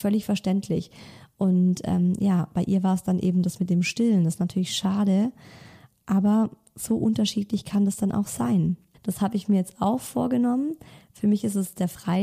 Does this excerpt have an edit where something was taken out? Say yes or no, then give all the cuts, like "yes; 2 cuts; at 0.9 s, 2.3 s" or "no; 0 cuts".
yes; 1 cut; at 8.9 s